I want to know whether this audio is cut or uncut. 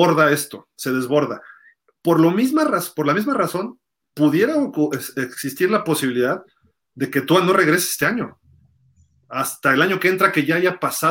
uncut